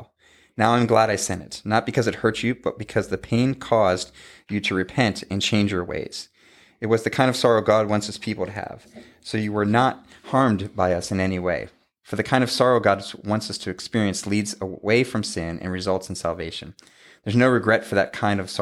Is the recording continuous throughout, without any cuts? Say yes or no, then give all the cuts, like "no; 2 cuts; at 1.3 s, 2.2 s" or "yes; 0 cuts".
yes; 0 cuts